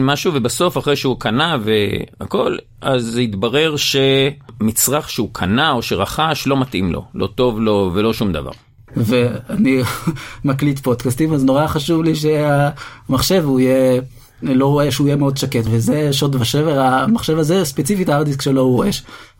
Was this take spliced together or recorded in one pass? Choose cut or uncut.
cut